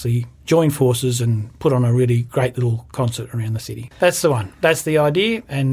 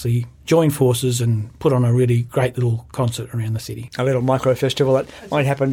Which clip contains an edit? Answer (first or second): first